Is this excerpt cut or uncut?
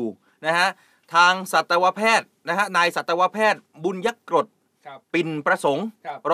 cut